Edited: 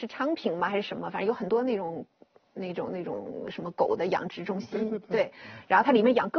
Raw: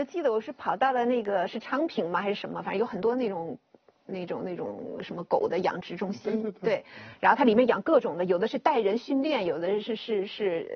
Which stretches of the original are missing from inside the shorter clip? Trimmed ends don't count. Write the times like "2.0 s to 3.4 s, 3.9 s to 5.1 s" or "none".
none